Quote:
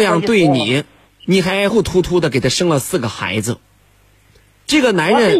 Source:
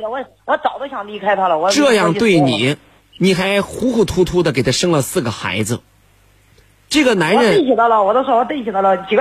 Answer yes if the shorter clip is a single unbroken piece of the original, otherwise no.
no